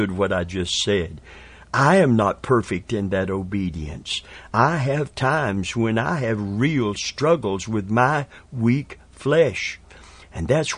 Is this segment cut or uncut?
uncut